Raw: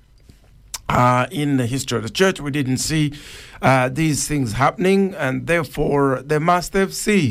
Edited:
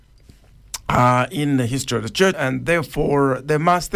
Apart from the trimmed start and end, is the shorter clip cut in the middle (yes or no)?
yes